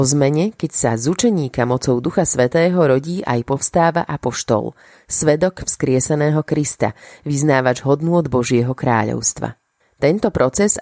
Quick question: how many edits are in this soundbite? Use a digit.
0